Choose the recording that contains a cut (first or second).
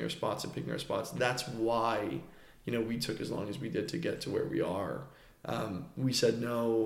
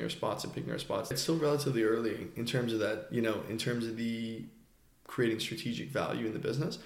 second